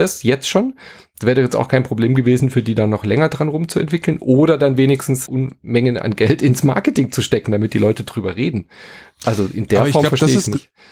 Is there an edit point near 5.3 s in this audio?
yes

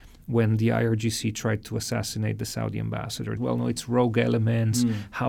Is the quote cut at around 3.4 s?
yes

